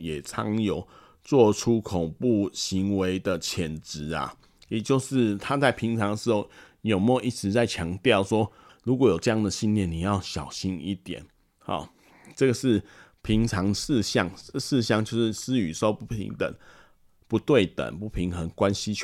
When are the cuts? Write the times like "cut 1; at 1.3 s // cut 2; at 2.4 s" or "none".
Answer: cut 1; at 8.7 s

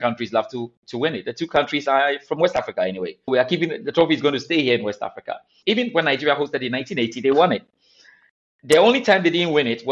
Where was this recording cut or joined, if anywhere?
cut 1; at 3.3 s // cut 2; at 5.6 s

